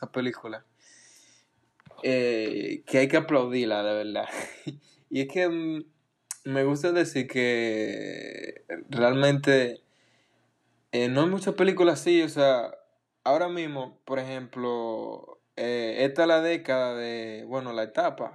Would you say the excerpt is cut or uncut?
uncut